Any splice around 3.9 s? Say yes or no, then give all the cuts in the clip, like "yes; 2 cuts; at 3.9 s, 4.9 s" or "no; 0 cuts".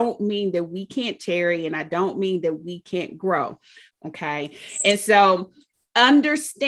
yes; 1 cut; at 3.9 s